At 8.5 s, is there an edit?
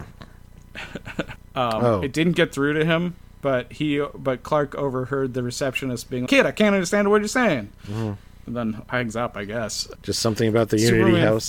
no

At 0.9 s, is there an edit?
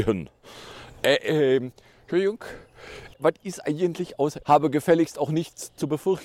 no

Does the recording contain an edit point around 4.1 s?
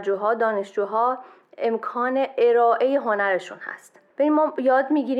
yes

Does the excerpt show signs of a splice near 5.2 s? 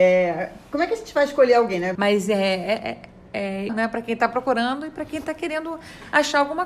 no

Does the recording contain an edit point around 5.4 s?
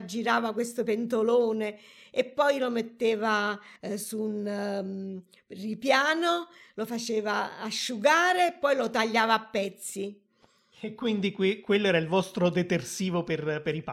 no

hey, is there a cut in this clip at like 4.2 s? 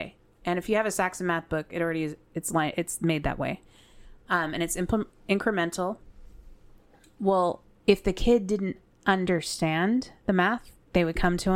no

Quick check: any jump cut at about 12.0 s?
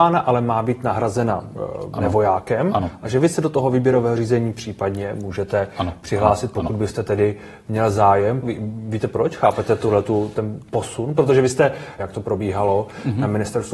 yes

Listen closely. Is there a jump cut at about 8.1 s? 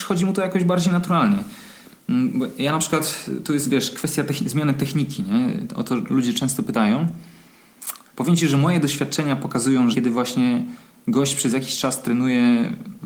yes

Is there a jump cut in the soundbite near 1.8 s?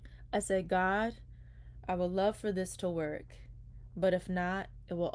no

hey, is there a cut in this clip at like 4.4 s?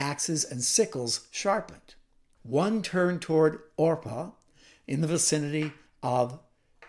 no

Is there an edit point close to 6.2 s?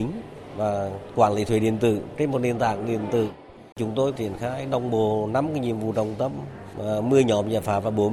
no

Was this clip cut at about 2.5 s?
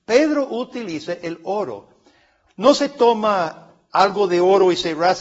yes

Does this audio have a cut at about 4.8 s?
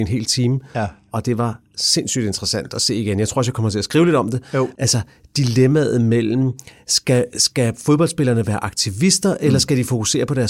yes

